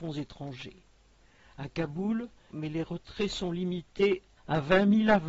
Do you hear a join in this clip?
yes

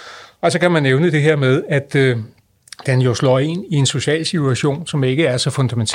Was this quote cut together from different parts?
no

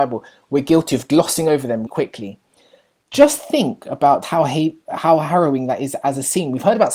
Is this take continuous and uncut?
no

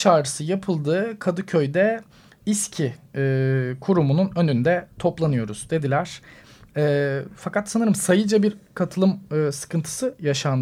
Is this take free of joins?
yes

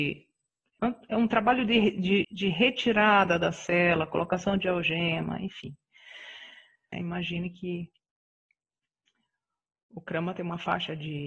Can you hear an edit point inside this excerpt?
yes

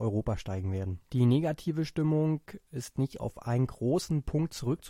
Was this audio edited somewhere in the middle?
yes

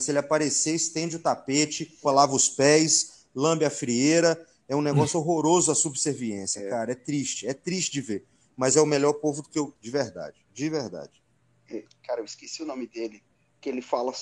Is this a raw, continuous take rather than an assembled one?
no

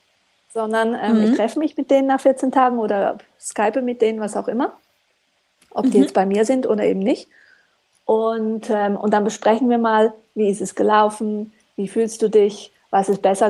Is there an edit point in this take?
no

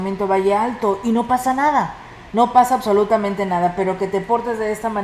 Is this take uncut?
yes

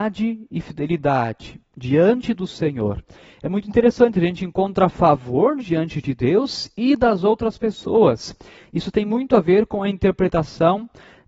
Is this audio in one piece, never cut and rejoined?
yes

